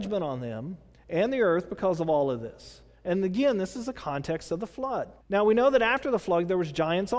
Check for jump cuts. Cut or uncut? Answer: cut